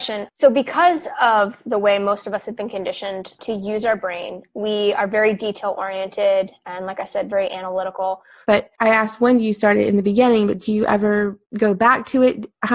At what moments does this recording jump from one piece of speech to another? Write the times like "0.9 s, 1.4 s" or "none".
8.4 s